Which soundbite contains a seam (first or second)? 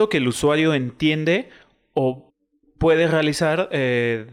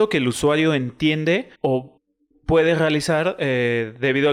second